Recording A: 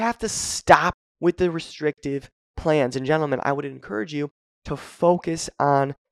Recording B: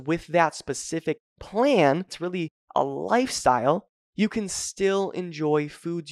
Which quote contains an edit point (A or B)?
B